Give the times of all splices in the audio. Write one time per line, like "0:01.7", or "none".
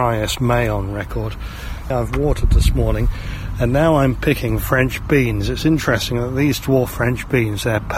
0:01.9